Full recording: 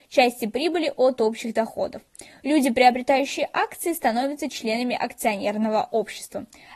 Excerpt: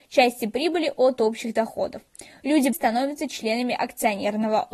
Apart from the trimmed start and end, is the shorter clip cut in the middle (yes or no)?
yes